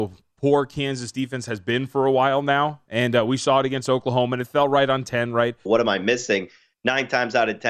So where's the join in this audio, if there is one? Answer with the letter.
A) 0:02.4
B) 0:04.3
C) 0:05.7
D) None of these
C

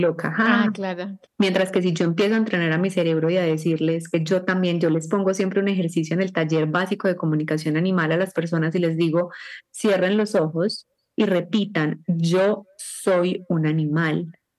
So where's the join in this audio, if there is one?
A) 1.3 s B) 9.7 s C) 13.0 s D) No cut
A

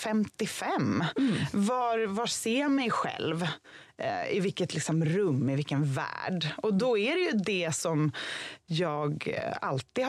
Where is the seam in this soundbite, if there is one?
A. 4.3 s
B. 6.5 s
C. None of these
C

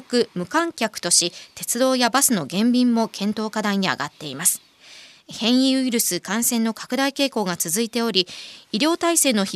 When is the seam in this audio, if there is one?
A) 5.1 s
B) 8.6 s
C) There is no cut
C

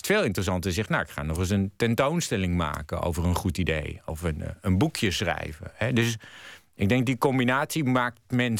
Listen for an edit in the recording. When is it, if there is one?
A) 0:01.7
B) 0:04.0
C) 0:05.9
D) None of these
D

